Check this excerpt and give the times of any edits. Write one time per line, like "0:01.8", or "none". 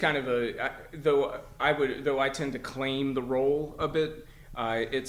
none